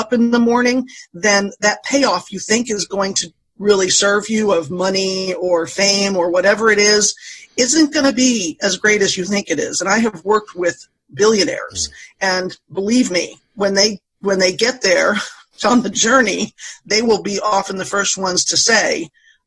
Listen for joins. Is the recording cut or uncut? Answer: uncut